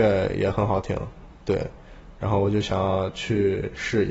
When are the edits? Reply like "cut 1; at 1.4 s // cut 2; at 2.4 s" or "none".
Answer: none

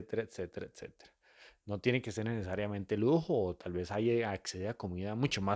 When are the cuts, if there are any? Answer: none

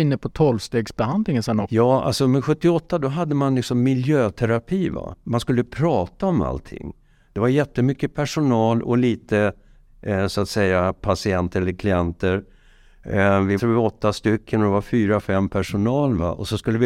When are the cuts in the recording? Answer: cut 1; at 13.6 s

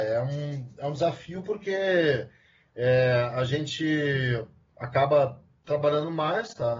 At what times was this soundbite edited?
none

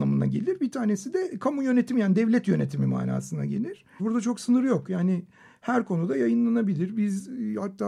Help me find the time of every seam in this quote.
cut 1; at 4.0 s

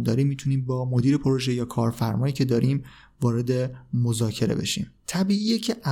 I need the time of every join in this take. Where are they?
cut 1; at 5.0 s

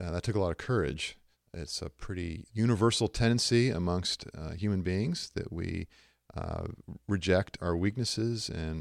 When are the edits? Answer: cut 1; at 1.3 s // cut 2; at 2.5 s // cut 3; at 7.6 s

